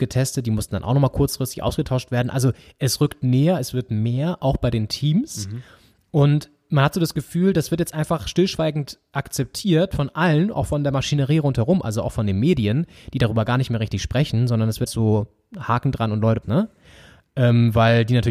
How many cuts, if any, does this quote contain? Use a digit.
2